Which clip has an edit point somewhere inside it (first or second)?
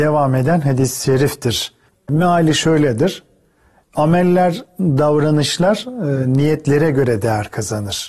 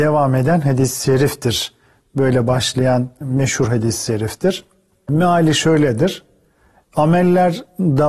first